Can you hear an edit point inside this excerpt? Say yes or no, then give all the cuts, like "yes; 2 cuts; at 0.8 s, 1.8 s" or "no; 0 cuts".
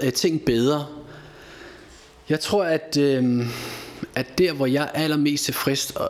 no; 0 cuts